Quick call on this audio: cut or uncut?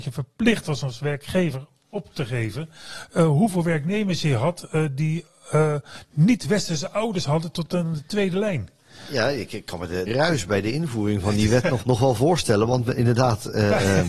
cut